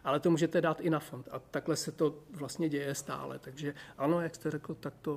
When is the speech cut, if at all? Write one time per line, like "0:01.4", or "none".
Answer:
0:01.2